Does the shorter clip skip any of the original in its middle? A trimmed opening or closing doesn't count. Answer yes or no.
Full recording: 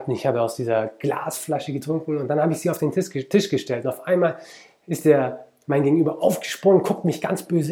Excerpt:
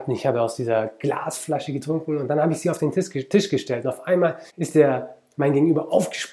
yes